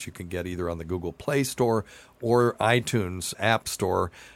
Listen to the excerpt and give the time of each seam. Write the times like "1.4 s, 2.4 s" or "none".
3.3 s

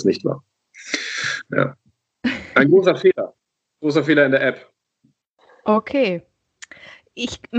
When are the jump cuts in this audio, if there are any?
none

